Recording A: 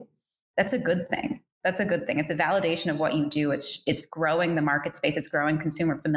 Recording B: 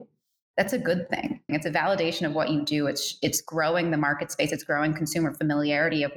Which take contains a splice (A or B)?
B